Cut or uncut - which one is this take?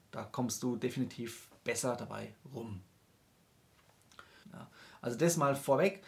cut